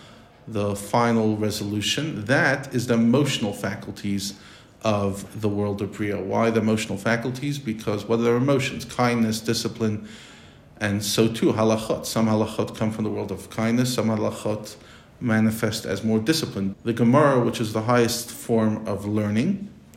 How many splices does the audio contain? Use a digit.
1